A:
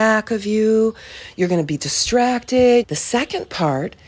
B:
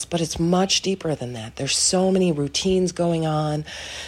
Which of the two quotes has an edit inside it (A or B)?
A